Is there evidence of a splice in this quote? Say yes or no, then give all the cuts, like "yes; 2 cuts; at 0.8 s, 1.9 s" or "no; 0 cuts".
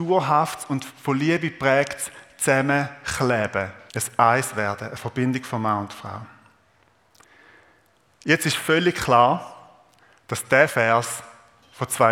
yes; 1 cut; at 3.9 s